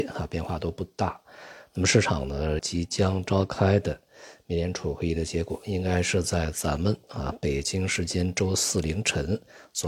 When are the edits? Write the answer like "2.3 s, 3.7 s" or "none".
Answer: 2.6 s